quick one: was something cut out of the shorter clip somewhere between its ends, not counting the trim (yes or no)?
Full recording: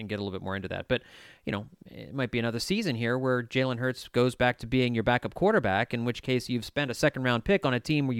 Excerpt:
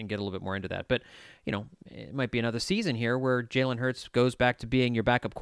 no